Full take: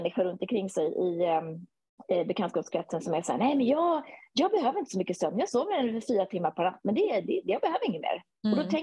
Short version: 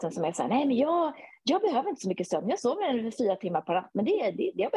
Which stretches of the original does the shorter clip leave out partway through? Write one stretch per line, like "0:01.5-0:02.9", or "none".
none